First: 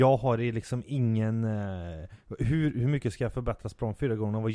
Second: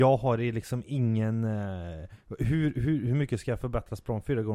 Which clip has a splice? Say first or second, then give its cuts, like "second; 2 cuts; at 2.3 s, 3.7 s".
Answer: first; 1 cut; at 2.7 s